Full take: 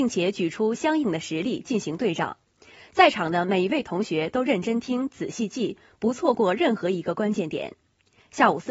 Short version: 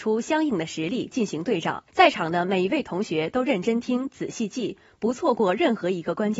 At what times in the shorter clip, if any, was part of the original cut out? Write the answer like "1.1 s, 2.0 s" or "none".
1.9 s